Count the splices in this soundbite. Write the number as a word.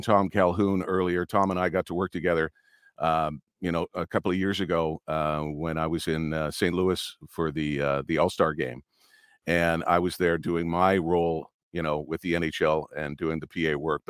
zero